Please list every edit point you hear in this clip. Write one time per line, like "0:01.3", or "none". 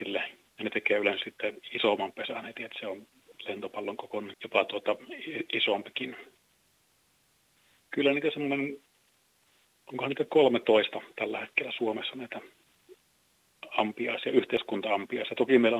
0:04.3